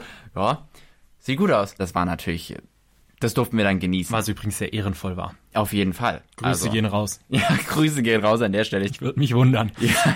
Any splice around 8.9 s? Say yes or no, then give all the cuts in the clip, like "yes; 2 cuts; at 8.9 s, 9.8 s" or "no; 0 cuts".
yes; 2 cuts; at 1.8 s, 8.9 s